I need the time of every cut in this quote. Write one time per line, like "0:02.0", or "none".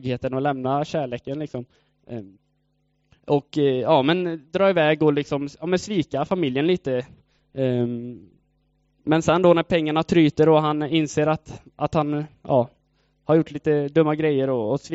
none